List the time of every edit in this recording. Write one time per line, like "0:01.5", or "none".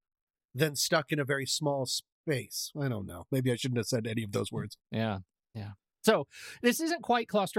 0:04.8